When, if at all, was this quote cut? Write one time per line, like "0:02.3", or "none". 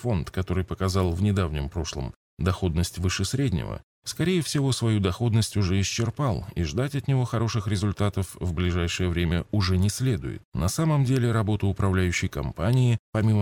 0:10.5